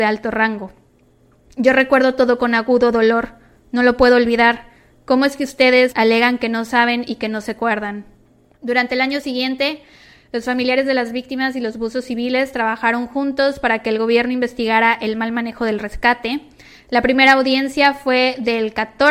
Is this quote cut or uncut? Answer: cut